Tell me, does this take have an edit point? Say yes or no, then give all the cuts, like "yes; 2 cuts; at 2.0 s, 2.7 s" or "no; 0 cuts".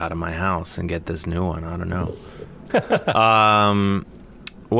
yes; 1 cut; at 2.7 s